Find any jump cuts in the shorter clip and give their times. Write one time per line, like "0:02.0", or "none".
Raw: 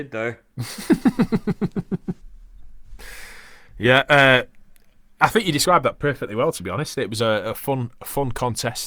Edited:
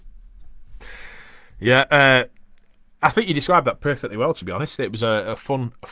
none